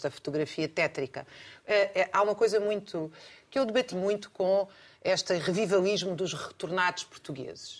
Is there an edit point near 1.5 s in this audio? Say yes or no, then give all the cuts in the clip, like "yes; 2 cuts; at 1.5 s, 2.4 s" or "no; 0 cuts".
no; 1 cut; at 3.9 s